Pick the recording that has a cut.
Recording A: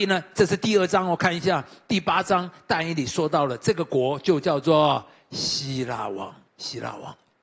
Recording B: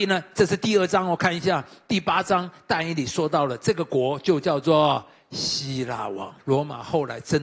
B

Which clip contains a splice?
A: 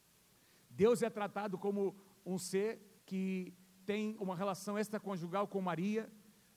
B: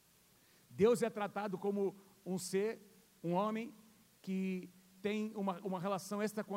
A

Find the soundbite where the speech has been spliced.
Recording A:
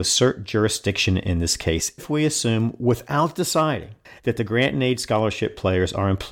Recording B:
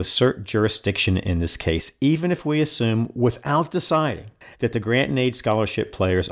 A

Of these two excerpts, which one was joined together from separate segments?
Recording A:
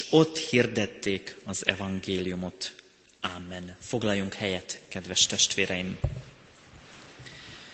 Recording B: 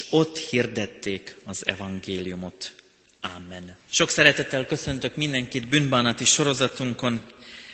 B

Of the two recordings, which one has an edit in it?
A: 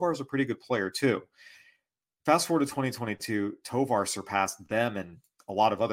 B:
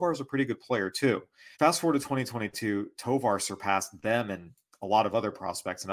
B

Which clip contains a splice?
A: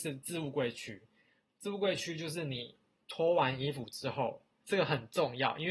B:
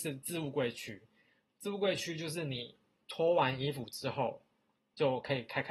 A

